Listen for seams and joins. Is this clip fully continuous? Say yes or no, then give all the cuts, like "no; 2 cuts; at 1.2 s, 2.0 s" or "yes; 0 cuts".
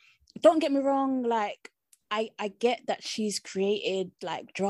yes; 0 cuts